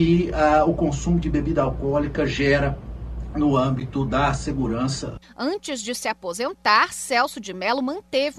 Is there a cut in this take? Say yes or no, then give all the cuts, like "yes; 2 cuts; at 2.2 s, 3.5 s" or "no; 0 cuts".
yes; 1 cut; at 5.2 s